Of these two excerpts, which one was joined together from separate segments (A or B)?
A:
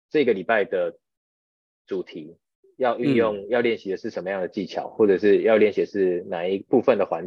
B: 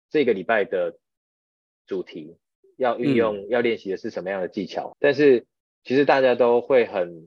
B